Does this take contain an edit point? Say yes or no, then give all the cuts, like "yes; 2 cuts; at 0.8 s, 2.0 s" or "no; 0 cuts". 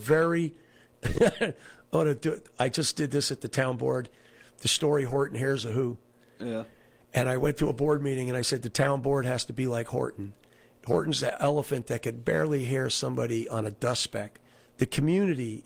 no; 0 cuts